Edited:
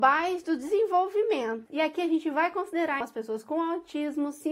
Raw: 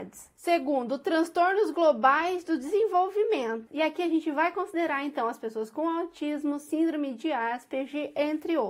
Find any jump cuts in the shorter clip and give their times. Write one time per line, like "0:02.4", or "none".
0:03.0